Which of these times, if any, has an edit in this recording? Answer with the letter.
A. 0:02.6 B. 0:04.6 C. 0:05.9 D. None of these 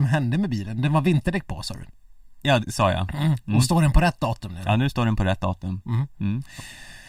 A